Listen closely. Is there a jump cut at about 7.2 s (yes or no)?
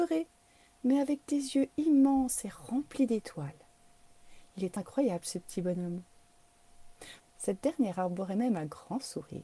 yes